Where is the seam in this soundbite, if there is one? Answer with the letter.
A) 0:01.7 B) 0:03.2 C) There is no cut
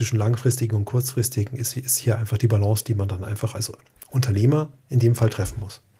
C